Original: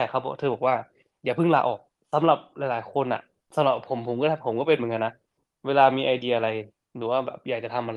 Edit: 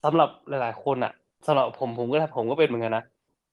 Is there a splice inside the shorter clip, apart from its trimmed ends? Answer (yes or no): no